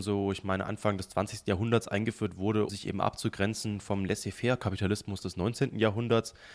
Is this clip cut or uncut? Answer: cut